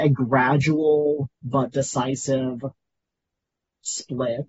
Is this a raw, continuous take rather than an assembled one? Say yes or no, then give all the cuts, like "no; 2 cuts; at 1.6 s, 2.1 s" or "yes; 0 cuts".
no; 1 cut; at 1.4 s